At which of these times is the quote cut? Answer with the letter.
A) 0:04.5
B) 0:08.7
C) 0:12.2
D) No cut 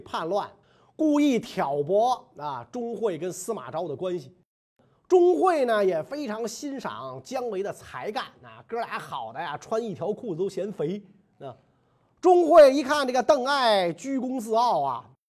D